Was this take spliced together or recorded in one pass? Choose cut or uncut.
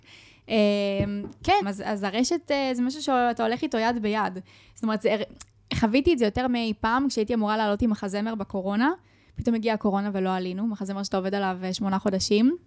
cut